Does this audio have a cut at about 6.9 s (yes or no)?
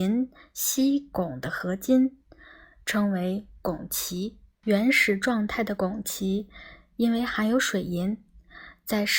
no